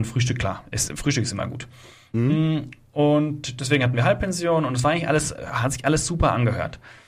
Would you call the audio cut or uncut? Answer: uncut